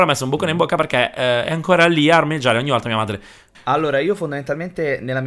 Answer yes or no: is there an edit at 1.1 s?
no